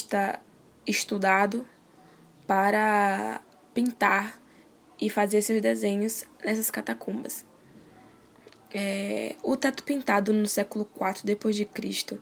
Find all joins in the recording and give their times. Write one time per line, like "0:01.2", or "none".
none